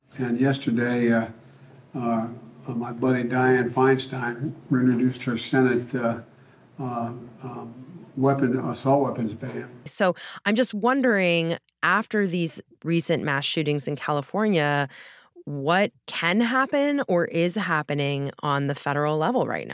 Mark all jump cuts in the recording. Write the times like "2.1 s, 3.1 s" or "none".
9.9 s, 16.0 s